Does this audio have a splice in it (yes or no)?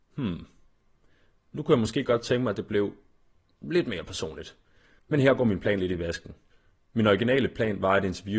yes